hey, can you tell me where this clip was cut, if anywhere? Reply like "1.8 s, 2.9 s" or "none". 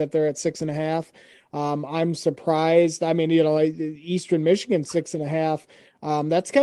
none